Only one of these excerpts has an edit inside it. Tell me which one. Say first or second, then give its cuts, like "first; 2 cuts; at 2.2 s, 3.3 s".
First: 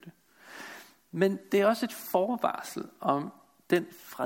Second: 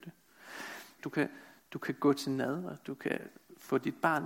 second; 1 cut; at 1.0 s